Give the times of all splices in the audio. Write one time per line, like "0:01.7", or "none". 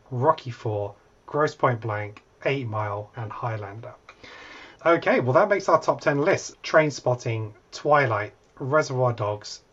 0:03.1
0:04.8
0:06.5

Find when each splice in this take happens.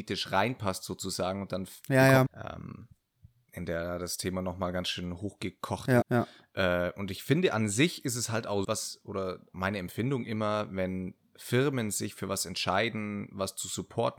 0:02.3
0:06.0
0:08.6

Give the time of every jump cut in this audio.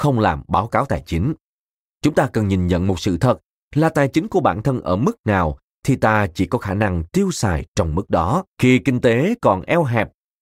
0:01.8
0:08.5

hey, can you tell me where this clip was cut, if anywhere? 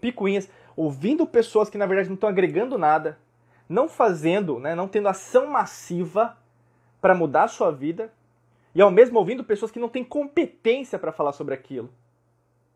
none

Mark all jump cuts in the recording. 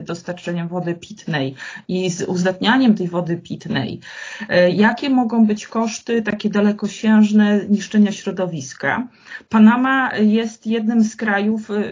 none

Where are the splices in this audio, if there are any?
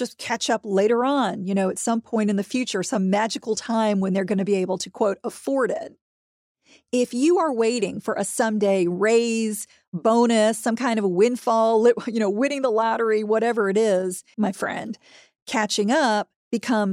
0:14.3

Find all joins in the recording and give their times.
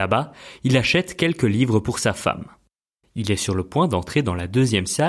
none

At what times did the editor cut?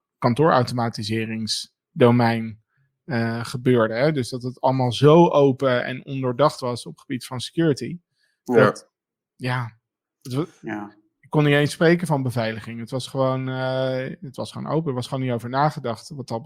none

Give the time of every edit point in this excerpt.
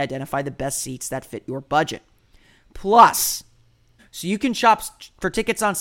0:04.0

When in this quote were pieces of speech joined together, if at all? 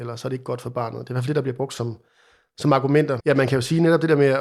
0:03.2

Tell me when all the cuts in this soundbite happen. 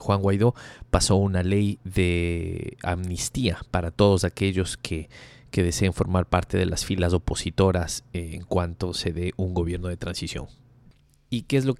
none

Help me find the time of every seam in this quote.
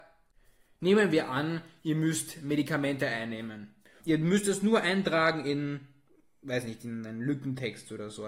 0:04.0

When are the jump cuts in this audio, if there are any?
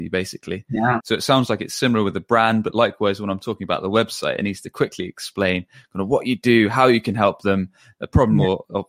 0:01.0

